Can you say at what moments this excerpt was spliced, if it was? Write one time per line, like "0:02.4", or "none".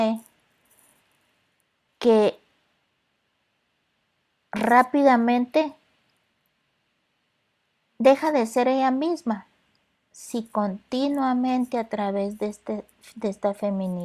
0:01.9